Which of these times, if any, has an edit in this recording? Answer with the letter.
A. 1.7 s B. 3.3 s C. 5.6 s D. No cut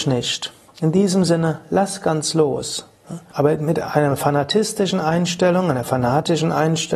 B